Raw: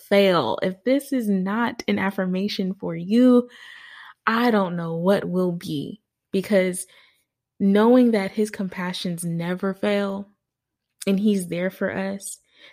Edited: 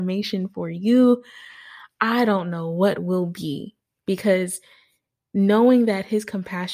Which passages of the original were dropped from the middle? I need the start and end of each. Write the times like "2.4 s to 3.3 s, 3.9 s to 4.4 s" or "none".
none